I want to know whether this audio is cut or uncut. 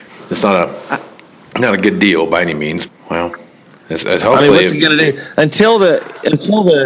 cut